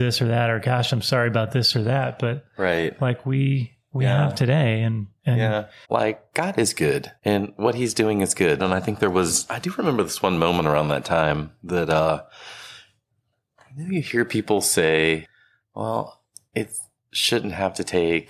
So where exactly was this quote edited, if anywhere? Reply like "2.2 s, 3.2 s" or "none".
5.8 s, 7.2 s, 8.6 s